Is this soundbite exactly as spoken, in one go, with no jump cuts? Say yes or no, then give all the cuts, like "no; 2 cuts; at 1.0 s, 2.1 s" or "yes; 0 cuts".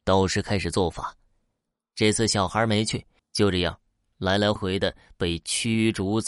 no; 2 cuts; at 3.2 s, 4.6 s